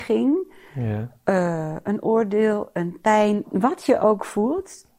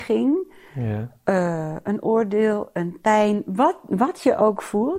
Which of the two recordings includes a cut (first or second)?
first